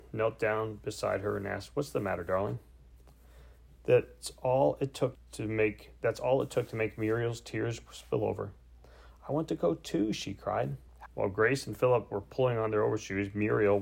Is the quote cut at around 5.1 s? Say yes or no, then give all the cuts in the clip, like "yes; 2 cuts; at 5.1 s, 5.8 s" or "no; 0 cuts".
yes; 2 cuts; at 5.1 s, 11.1 s